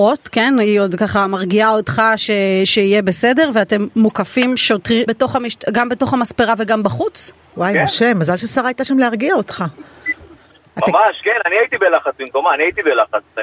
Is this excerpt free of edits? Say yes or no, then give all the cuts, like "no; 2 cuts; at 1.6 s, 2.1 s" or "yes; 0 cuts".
no; 2 cuts; at 5.1 s, 7.5 s